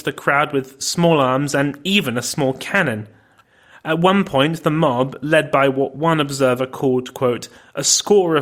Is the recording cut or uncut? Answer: uncut